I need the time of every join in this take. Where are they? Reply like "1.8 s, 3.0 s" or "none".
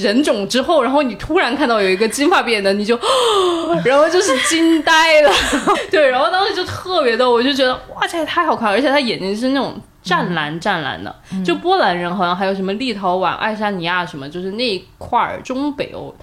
5.7 s